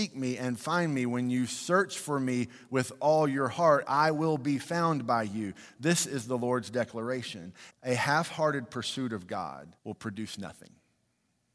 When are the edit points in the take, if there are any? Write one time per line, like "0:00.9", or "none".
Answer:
0:07.7
0:09.8